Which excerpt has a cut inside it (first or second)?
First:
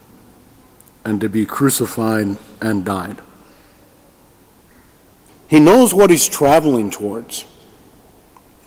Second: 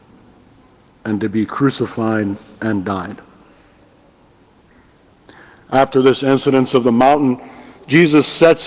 first